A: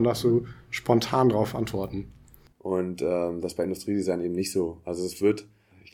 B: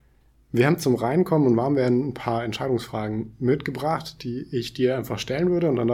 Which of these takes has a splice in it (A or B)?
A